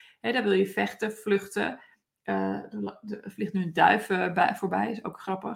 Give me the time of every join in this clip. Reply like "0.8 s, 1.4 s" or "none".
none